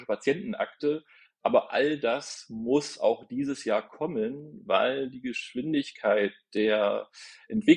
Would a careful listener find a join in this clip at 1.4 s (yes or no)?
no